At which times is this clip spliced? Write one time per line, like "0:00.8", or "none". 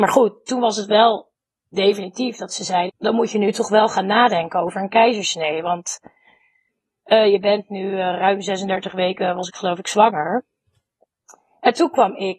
0:02.9